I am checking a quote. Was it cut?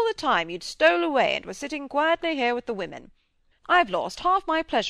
yes; 1 cut; at 3.5 s

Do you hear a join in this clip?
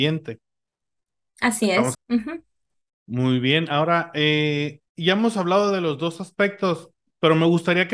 yes; 2 cuts; at 1.9 s, 4.9 s

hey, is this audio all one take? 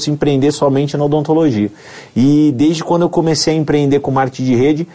yes; 0 cuts

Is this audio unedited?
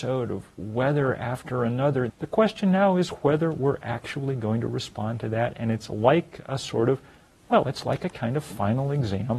no; 1 cut; at 2.1 s

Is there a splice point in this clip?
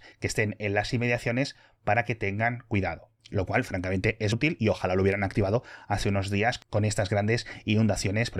yes; 2 cuts; at 3.2 s, 4.3 s

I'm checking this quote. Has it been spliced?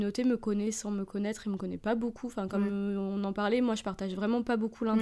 no; 0 cuts

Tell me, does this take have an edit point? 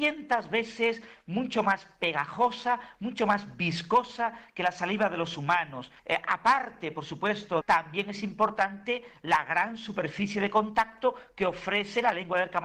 yes; 2 cuts; at 6.0 s, 7.6 s

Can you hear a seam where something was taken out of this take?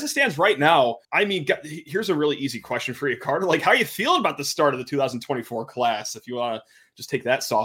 yes; 1 cut; at 1.0 s

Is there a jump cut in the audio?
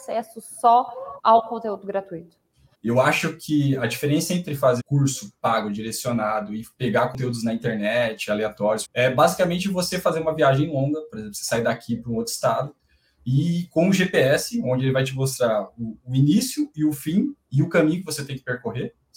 yes; 3 cuts; at 2.7 s, 4.8 s, 8.8 s

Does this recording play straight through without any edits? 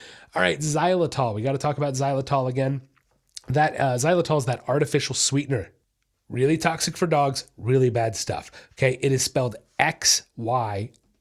yes; 0 cuts

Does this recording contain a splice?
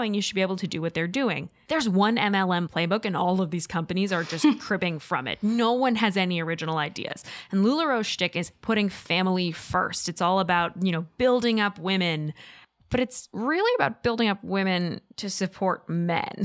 yes; 1 cut; at 1.7 s

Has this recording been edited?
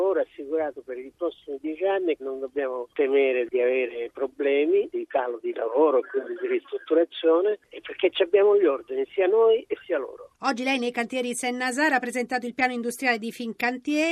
yes; 1 cut; at 2.2 s

